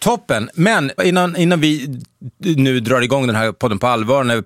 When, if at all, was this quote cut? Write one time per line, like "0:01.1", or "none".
0:01.0